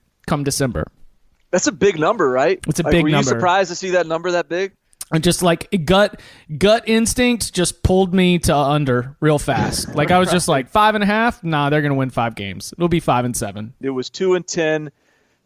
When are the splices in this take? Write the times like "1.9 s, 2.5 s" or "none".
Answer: 13.8 s